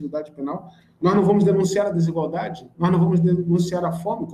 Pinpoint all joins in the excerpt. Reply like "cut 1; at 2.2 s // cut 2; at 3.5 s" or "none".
none